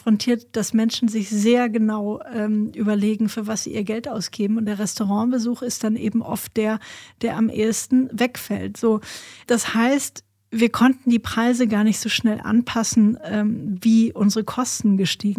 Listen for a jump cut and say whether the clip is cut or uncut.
uncut